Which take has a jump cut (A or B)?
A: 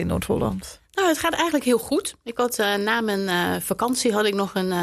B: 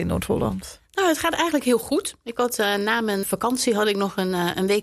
B